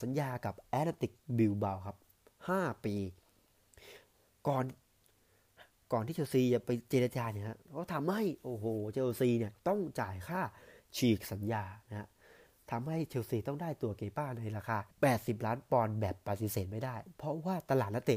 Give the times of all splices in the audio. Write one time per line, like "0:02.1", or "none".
0:09.6
0:14.9